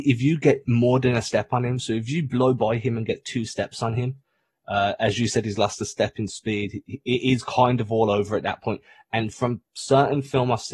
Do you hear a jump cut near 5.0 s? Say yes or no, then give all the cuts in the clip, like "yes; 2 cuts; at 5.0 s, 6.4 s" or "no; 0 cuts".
no; 0 cuts